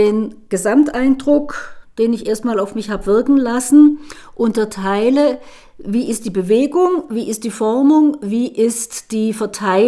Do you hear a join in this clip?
no; 0 cuts

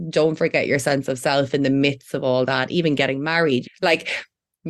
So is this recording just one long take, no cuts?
no; 1 cut; at 3.6 s

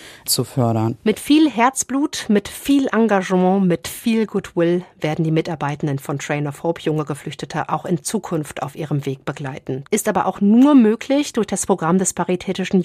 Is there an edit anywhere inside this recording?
yes; 1 cut; at 9.9 s

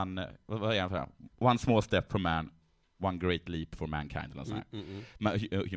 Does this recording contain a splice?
no; 0 cuts

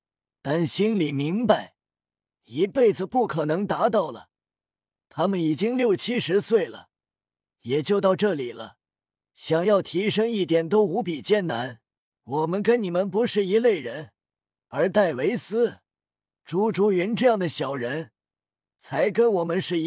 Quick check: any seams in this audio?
yes; 1 cut; at 12.1 s

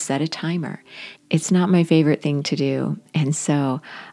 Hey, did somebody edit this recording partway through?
yes; 1 cut; at 1.2 s

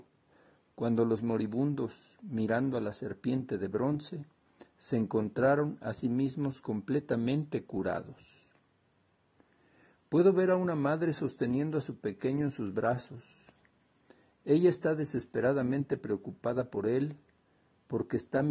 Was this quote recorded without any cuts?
yes; 0 cuts

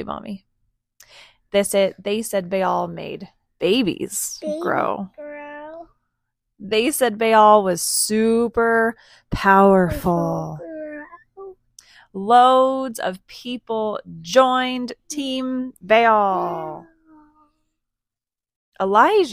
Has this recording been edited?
no; 0 cuts

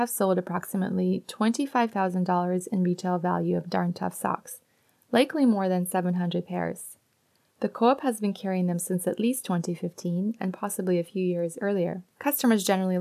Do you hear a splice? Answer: yes; 1 cut; at 12.1 s

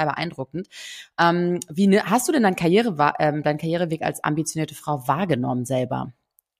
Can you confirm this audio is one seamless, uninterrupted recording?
yes; 0 cuts

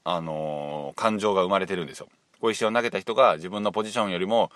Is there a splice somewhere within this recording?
yes; 1 cut; at 2.3 s

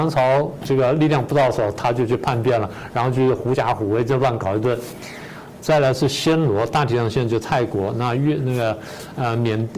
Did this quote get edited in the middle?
yes; 1 cut; at 5.6 s

